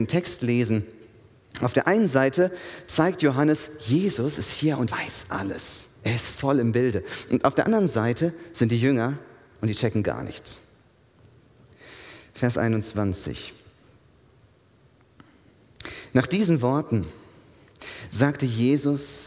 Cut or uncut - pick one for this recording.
cut